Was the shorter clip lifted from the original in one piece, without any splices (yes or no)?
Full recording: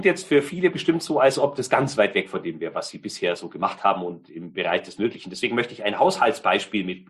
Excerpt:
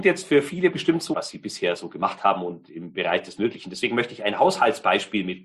no